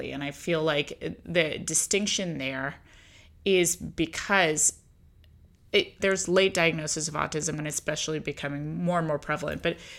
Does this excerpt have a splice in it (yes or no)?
yes